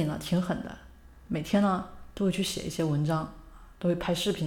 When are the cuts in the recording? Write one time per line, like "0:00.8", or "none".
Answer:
none